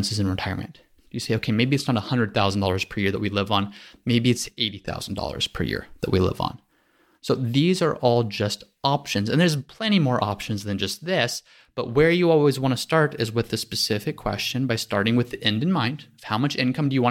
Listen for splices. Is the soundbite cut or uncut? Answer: uncut